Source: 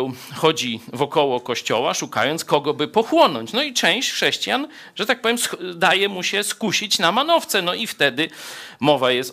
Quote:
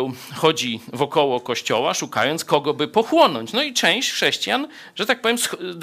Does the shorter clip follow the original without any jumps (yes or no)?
yes